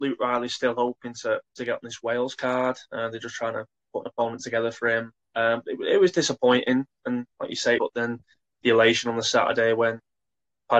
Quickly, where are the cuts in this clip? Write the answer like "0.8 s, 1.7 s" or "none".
7.8 s